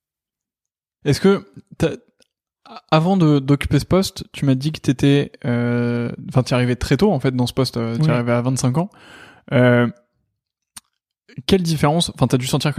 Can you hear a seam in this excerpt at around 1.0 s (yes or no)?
yes